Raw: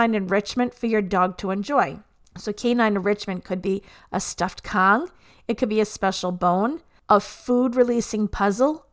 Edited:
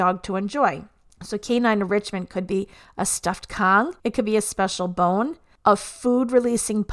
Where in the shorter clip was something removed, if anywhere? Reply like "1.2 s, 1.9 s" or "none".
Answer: 4.0 s